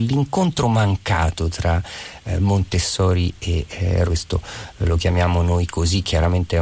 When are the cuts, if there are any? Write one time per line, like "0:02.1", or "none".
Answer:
0:04.1